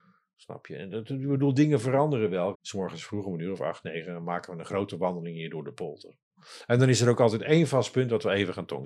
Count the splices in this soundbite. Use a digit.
1